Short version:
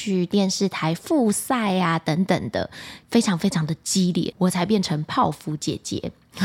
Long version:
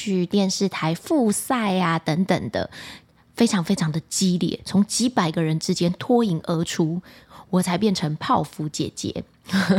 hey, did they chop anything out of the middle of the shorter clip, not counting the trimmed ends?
yes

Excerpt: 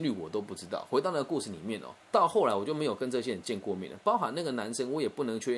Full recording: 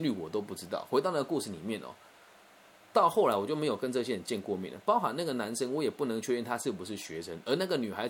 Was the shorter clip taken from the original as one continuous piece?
no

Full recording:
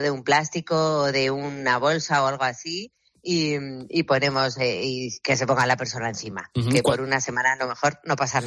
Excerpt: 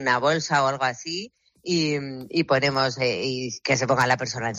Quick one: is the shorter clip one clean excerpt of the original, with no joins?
yes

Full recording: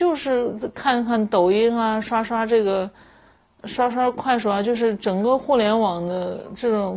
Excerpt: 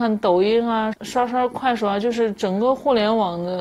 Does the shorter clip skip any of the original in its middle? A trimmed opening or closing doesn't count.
yes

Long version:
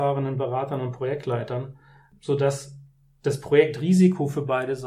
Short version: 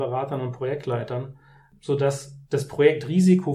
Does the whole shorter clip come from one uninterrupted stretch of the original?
no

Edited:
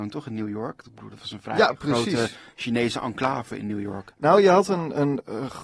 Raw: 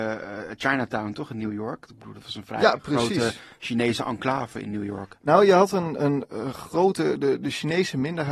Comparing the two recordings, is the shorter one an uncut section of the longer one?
yes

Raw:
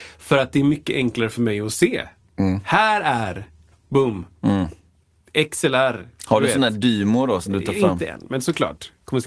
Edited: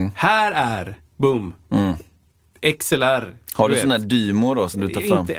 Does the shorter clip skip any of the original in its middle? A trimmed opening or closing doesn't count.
yes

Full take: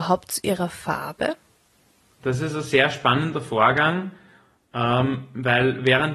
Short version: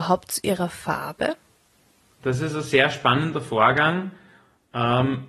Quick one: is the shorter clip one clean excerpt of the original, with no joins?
yes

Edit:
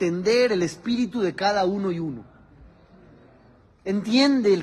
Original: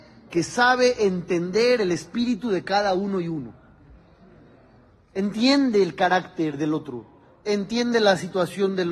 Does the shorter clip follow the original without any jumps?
yes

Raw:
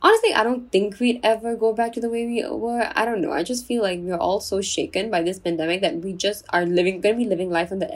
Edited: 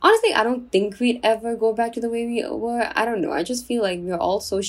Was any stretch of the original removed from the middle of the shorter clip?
no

